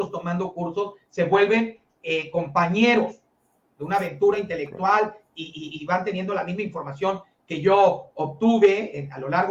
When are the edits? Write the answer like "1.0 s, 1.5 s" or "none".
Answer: none